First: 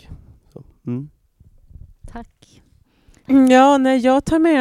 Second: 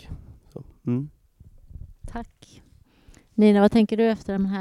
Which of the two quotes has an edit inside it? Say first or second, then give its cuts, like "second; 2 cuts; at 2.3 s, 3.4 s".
first; 1 cut; at 3.2 s